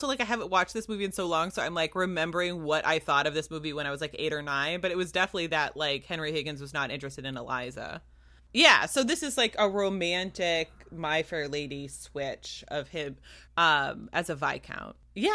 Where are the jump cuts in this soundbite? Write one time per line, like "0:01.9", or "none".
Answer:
0:08.4
0:13.5